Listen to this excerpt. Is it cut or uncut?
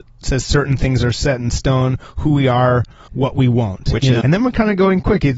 cut